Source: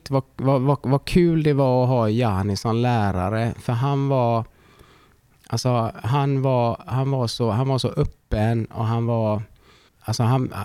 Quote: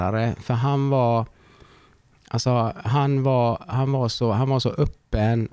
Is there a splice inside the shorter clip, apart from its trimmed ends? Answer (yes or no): no